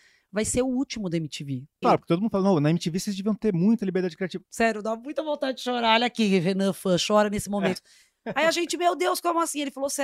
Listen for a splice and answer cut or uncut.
cut